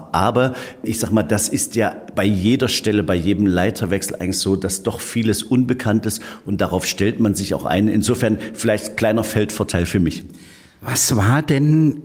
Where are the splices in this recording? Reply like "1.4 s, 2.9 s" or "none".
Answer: none